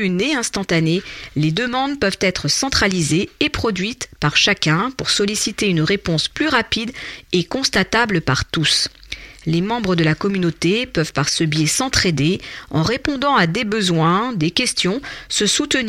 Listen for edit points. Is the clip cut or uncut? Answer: uncut